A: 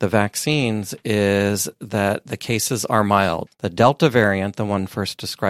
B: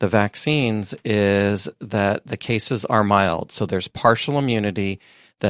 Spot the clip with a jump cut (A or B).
A